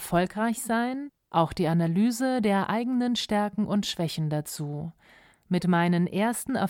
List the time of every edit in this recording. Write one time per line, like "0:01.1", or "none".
0:05.3

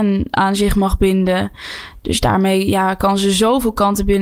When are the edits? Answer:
none

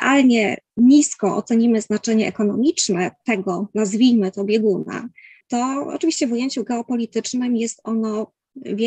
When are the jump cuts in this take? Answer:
0:05.4

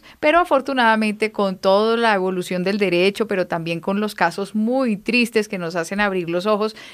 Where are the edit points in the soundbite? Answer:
none

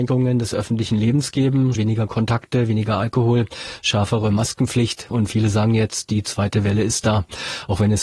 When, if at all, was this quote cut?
0:01.8

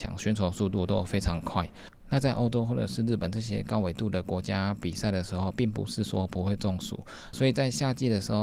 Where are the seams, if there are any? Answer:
0:07.3

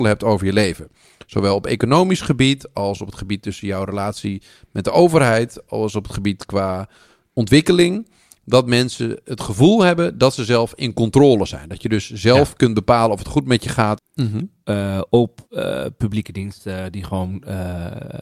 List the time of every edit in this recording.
0:14.0

